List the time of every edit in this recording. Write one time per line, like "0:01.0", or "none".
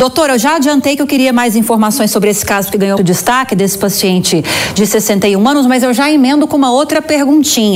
0:03.0